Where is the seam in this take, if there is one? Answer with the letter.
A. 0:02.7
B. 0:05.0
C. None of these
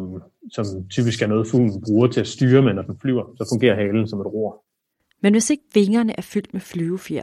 B